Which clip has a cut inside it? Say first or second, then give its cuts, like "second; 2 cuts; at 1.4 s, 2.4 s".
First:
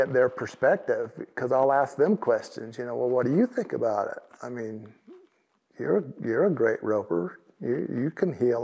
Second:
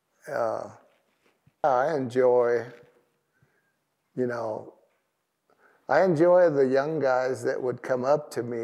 second; 1 cut; at 1.6 s